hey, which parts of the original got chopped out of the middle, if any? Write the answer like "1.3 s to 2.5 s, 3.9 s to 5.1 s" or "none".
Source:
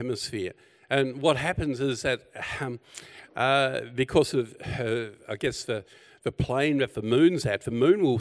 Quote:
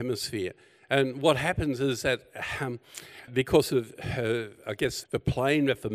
3.3 s to 3.9 s, 5.7 s to 6.2 s